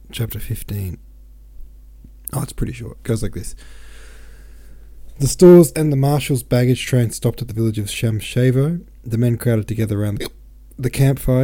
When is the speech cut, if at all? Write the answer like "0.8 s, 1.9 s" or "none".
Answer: 5.7 s